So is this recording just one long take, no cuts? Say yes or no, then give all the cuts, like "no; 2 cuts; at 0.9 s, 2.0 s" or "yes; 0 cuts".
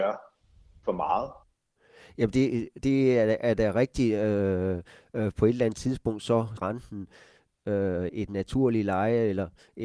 no; 2 cuts; at 6.6 s, 8.1 s